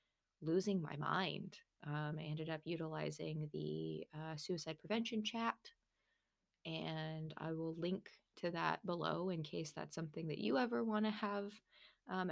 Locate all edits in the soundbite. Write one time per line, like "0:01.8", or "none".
none